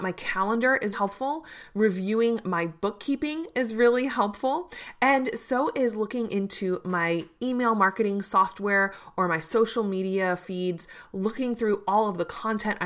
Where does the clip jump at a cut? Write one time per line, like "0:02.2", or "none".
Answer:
0:00.9